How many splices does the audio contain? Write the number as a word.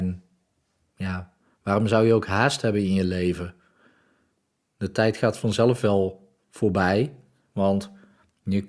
one